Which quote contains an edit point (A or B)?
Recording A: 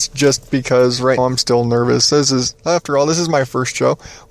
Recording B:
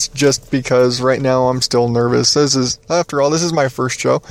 A